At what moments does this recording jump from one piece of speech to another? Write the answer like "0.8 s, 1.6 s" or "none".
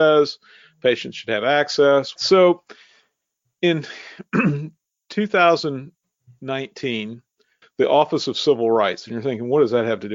2.2 s, 7.6 s